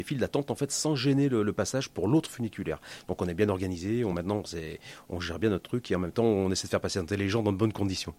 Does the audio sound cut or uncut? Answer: uncut